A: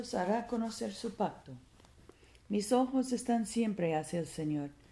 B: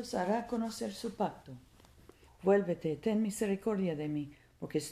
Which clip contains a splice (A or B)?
B